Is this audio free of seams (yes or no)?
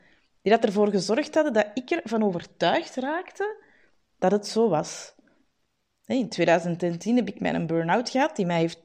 no